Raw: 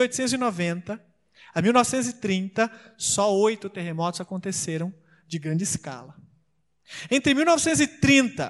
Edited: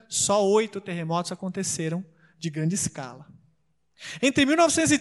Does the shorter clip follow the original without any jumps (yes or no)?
yes